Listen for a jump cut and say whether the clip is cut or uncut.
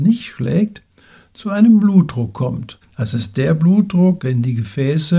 cut